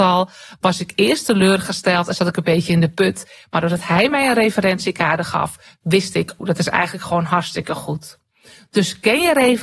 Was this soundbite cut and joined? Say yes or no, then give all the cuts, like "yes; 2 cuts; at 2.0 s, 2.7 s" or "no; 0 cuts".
yes; 1 cut; at 6.4 s